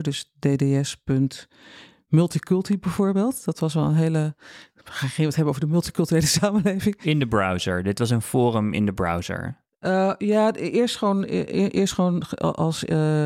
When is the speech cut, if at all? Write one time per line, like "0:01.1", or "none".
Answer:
none